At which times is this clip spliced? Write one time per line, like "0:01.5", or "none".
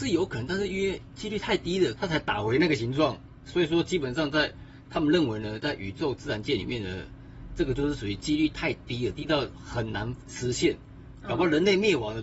0:02.0